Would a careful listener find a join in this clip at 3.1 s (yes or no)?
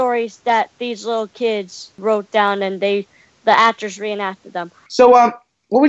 no